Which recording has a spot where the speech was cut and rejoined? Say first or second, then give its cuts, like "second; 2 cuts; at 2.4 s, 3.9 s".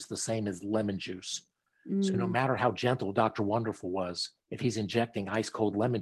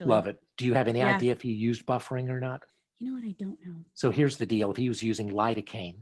first; 1 cut; at 4.4 s